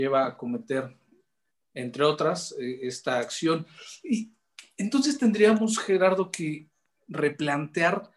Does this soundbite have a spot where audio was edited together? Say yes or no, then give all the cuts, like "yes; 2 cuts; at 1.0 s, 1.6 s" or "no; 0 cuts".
no; 0 cuts